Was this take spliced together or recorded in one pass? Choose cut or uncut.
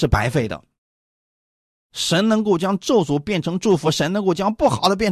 uncut